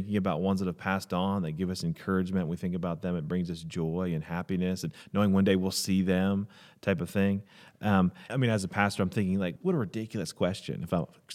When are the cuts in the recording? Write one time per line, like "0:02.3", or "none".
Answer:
0:08.3
0:09.6